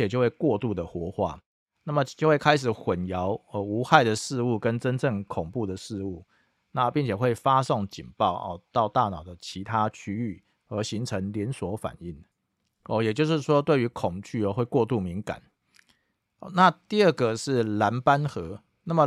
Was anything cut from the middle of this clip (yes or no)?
yes